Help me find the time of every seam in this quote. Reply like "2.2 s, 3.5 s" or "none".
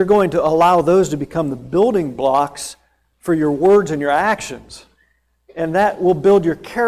none